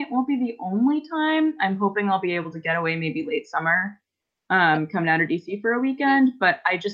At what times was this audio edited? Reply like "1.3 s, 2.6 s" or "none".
none